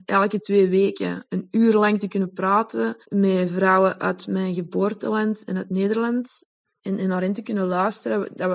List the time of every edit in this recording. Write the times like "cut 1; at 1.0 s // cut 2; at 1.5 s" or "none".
cut 1; at 3.0 s